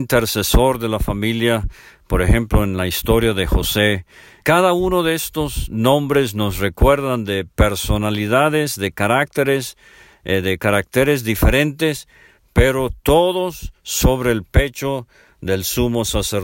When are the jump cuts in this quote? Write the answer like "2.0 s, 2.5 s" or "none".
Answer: 4.4 s